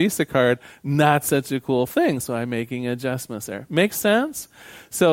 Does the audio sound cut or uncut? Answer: uncut